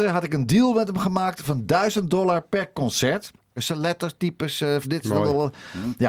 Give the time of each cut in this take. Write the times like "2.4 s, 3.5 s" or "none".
3.6 s, 4.8 s

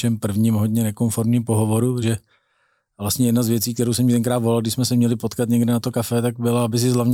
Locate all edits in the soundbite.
2.0 s

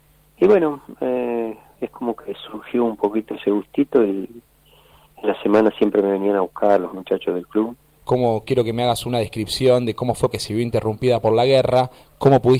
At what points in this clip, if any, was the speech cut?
8.0 s, 10.3 s

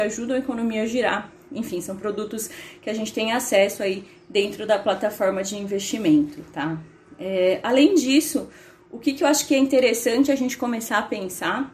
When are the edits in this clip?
none

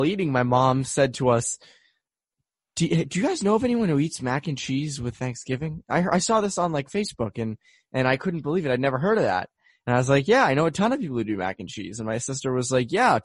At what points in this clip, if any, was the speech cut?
none

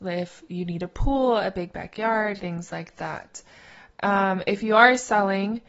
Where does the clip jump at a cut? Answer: 2.4 s

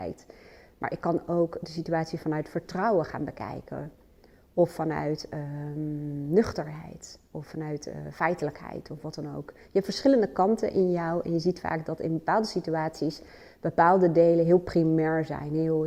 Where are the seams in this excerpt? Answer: none

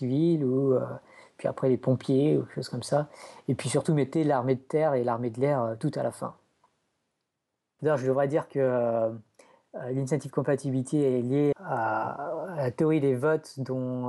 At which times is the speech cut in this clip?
7.8 s, 11.5 s

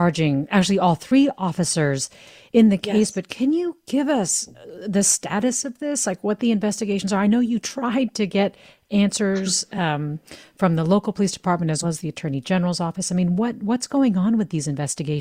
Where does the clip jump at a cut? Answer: 11.8 s

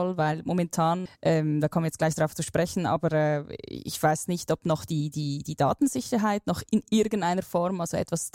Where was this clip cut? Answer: 1.1 s

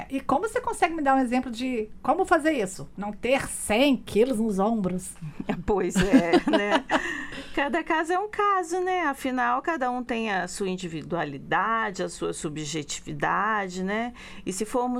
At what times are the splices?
none

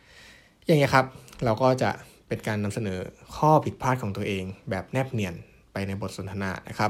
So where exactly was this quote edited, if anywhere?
none

